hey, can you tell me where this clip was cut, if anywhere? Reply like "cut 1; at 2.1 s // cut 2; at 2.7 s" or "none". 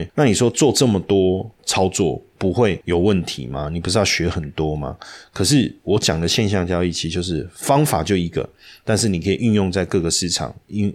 none